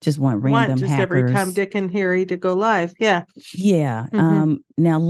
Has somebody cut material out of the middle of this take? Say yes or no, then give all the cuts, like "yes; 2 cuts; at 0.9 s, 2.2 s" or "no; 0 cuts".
no; 0 cuts